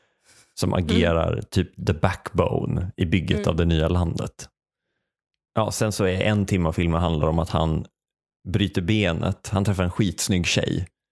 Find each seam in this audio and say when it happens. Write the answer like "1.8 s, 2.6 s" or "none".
none